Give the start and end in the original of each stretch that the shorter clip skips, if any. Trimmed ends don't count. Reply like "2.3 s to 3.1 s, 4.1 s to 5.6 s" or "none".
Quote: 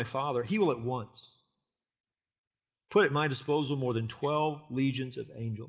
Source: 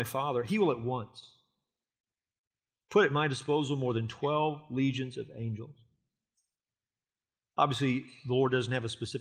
none